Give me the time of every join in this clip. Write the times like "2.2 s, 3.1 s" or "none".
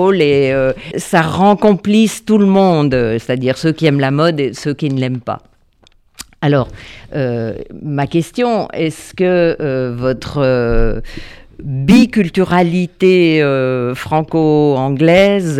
0.9 s